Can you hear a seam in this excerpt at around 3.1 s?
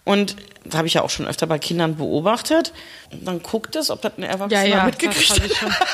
yes; 1 cut; at 3.1 s

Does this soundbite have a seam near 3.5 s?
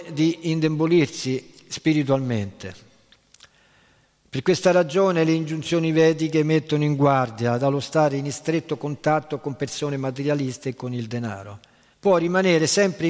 no; 1 cut; at 11.9 s

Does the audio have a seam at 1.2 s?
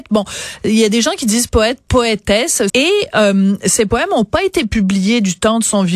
no; 1 cut; at 2.7 s

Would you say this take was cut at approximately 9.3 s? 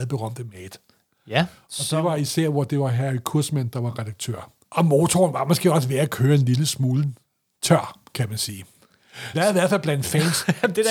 yes; 2 cuts; at 4.6 s, 9.3 s

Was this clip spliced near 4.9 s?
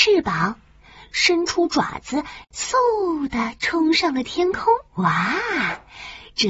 yes; 2 cuts; at 2.4 s, 4.9 s

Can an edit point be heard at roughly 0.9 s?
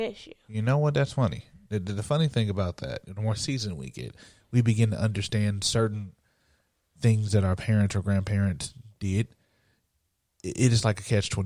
no; 1 cut; at 3.0 s

